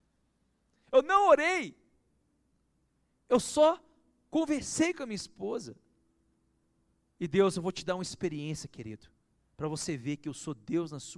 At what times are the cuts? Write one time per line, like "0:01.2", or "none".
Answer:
none